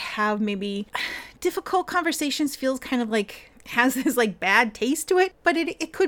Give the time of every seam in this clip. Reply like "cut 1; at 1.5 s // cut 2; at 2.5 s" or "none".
none